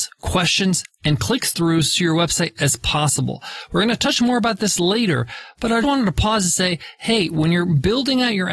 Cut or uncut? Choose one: cut